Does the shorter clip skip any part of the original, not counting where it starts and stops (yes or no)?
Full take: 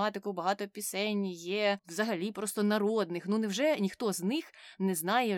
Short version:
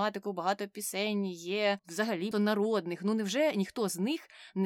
yes